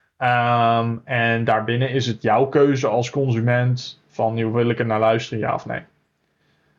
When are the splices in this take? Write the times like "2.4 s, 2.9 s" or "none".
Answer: none